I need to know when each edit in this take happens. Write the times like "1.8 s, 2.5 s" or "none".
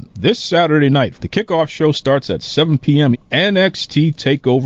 1.1 s, 3.1 s